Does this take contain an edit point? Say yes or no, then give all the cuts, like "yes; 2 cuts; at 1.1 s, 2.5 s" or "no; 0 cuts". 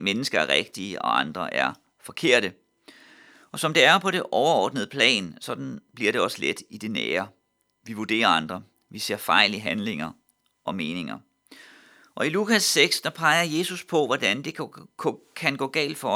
no; 0 cuts